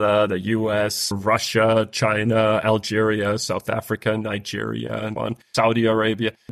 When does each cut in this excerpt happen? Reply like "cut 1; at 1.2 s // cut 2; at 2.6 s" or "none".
cut 1; at 1.1 s // cut 2; at 5.2 s